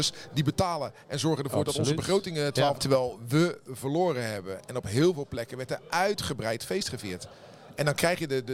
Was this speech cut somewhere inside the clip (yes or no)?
yes